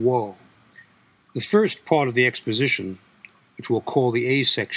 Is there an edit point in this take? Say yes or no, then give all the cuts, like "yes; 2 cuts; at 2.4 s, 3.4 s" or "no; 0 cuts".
no; 0 cuts